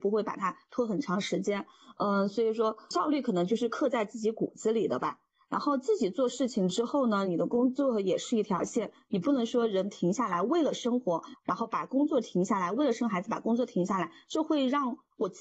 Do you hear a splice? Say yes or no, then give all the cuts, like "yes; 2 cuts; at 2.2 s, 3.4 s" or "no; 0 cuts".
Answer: yes; 1 cut; at 7.2 s